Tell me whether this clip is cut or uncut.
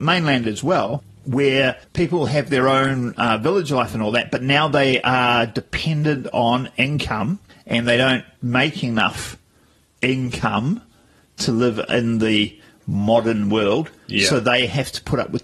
uncut